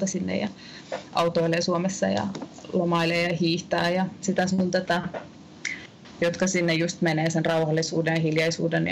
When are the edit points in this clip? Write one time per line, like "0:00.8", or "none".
none